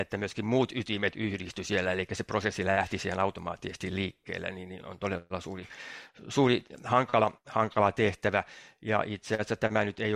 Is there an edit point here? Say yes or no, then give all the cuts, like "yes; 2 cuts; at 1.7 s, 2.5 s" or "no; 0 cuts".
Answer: yes; 1 cut; at 4.8 s